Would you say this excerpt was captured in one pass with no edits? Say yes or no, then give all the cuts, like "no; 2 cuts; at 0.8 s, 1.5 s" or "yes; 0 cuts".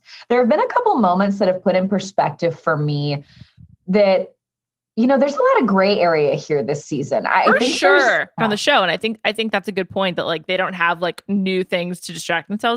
no; 1 cut; at 8.4 s